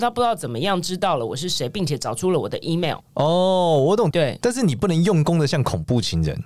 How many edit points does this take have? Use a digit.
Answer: 2